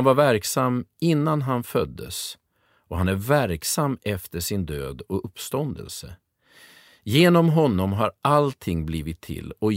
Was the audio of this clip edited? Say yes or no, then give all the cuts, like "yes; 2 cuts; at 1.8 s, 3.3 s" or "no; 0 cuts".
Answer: no; 0 cuts